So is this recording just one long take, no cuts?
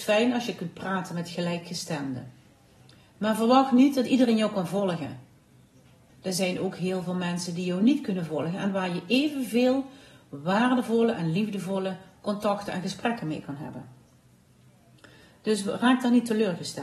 no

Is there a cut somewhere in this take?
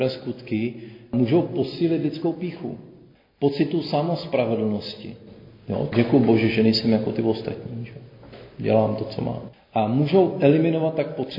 yes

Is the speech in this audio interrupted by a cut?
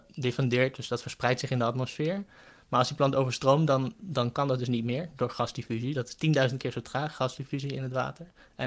no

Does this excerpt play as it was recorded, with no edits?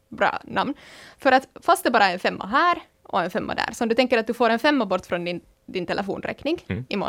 yes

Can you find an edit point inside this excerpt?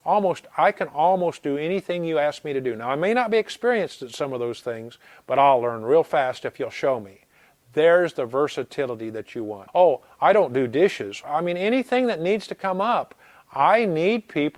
yes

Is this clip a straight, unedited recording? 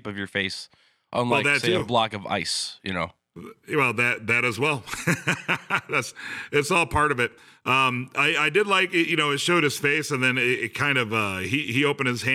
yes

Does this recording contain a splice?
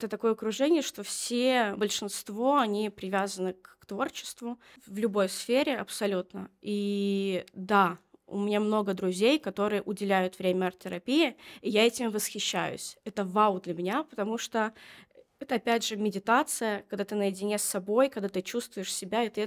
yes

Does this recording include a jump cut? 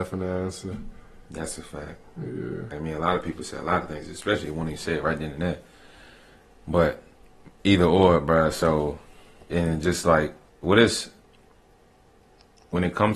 yes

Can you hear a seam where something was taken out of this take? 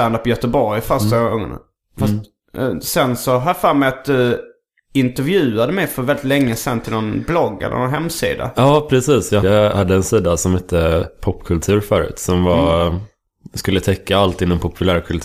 yes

